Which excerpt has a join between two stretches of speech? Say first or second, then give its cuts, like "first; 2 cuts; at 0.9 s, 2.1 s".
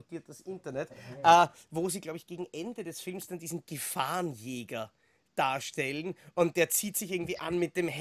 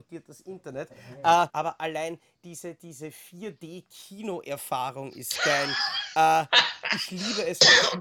second; 1 cut; at 1.5 s